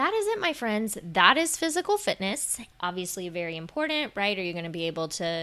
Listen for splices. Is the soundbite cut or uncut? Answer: cut